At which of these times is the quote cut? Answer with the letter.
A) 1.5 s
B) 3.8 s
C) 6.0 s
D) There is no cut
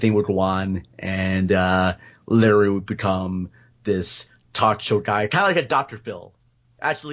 D